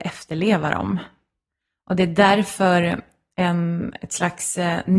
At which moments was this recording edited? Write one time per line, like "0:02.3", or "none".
none

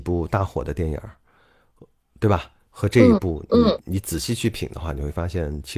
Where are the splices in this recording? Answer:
none

